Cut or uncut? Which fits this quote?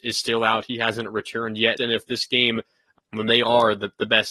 cut